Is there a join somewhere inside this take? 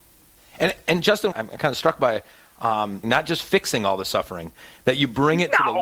yes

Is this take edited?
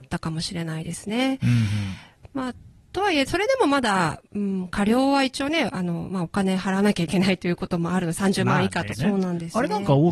yes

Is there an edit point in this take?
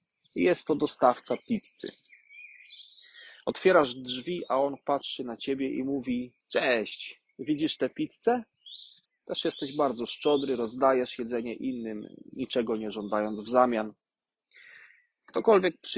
yes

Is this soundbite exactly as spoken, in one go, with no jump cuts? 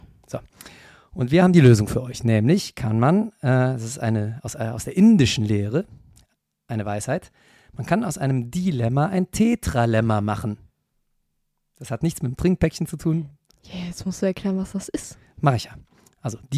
yes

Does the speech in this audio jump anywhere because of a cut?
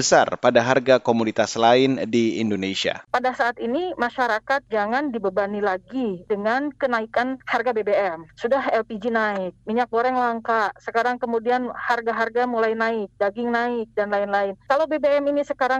no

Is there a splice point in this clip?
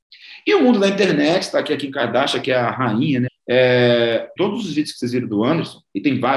yes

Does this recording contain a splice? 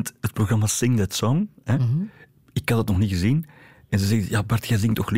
no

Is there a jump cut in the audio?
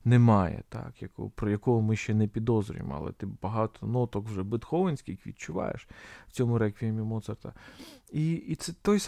no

